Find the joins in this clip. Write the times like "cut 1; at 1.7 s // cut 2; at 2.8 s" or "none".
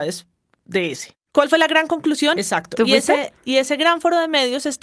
cut 1; at 1.2 s // cut 2; at 2.4 s